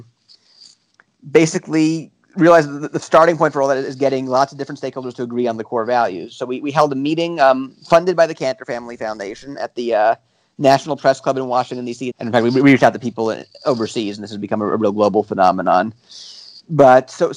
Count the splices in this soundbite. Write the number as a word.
one